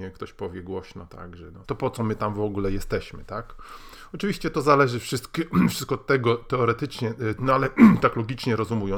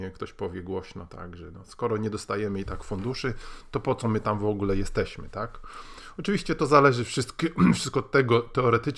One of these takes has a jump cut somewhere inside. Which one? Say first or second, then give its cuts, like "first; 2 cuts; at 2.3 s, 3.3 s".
first; 2 cuts; at 1.6 s, 7.4 s